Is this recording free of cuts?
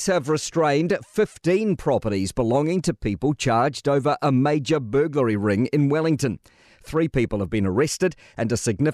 yes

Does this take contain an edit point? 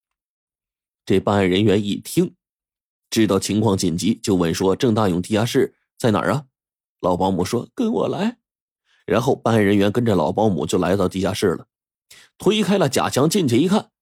no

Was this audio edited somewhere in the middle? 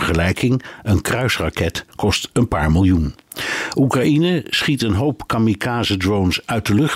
no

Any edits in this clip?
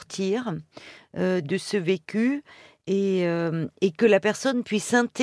yes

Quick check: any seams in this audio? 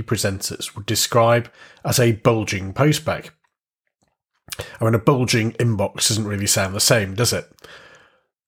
no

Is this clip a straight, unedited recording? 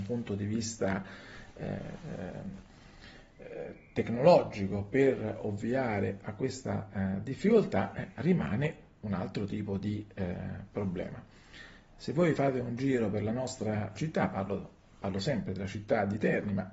no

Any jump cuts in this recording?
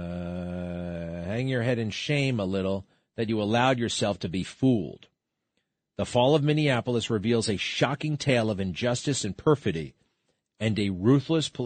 no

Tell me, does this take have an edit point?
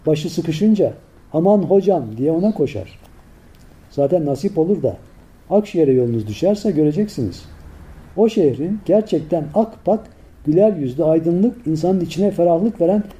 no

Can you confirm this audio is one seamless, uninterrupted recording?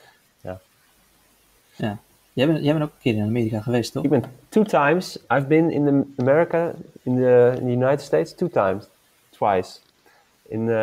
yes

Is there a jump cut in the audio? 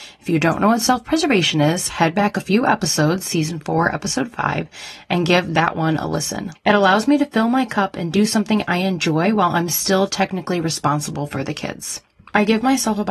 yes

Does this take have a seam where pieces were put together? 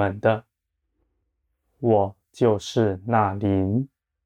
no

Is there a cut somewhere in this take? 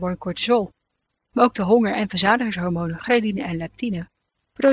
no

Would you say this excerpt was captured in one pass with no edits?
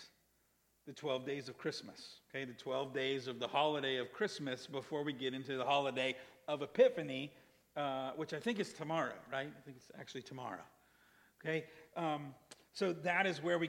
yes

